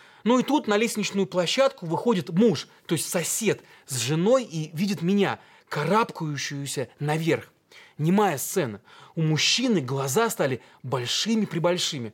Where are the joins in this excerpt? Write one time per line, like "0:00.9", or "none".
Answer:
none